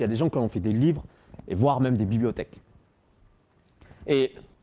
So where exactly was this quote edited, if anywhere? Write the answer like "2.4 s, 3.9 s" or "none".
none